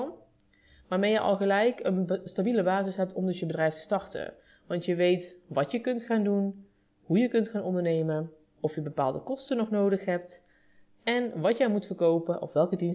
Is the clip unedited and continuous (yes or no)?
yes